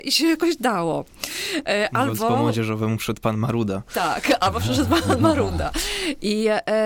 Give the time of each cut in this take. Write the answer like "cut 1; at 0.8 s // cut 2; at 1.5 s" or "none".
none